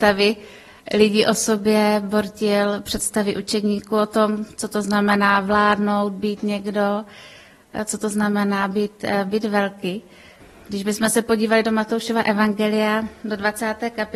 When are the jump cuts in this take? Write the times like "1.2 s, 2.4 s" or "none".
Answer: none